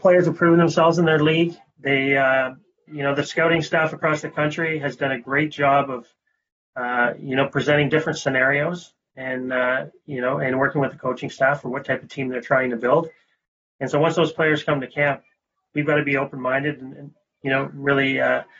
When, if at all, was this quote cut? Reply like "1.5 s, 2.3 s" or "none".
2.9 s